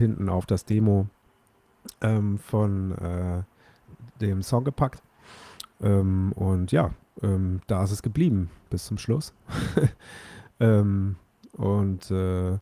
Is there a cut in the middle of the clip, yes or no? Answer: no